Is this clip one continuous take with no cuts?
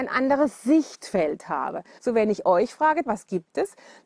no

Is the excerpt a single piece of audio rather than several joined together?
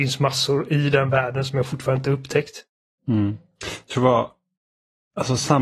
no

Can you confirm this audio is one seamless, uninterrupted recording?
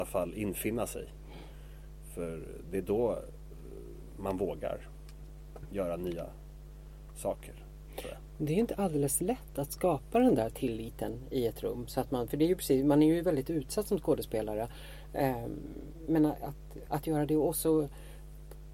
no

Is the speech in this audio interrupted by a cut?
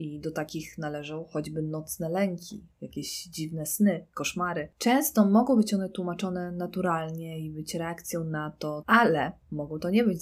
yes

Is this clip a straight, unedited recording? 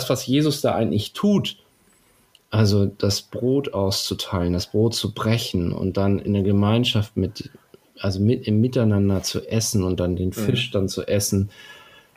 yes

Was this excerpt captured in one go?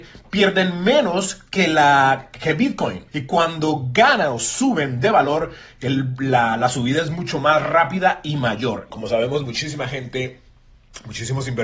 no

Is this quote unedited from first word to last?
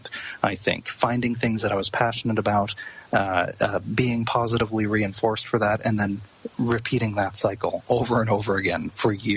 yes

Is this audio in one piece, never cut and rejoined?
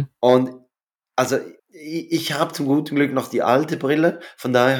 no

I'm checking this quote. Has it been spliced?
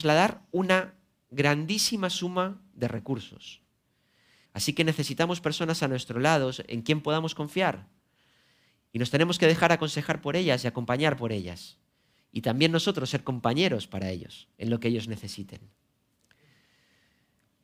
yes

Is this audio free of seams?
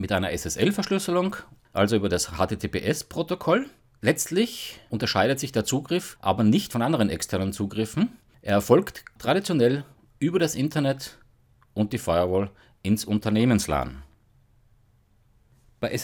yes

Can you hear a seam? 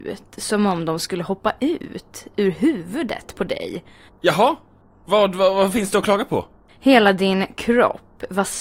yes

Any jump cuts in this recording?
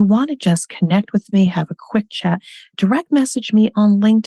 no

